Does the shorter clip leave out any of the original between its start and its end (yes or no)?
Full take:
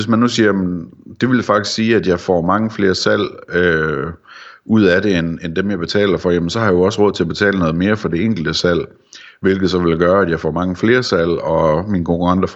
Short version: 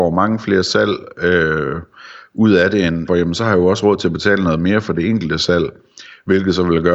yes